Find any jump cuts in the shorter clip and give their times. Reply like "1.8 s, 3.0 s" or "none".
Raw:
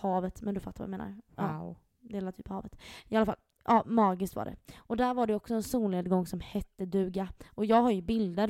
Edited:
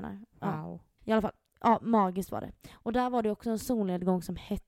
1.0 s